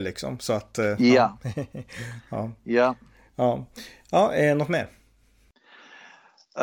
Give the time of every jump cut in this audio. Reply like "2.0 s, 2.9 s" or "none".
none